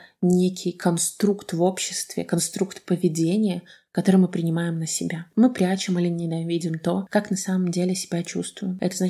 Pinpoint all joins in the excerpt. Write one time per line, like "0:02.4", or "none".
none